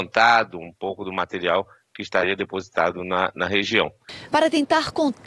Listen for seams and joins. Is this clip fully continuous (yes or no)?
no